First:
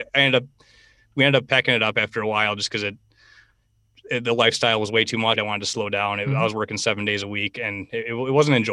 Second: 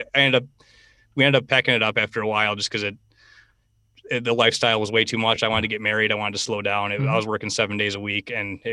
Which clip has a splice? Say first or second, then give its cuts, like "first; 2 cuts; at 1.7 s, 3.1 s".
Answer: first; 1 cut; at 5.4 s